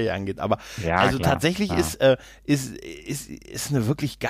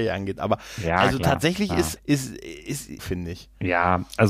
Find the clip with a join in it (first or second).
second